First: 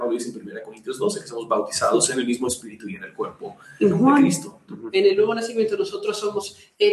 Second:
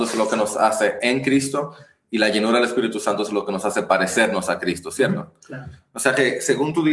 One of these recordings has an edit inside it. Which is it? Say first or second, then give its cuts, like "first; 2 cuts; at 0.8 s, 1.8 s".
first; 1 cut; at 4.7 s